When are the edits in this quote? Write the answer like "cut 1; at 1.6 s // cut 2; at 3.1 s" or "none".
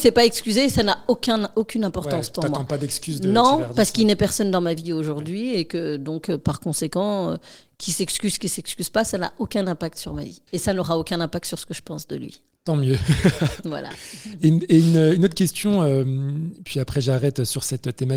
cut 1; at 10.5 s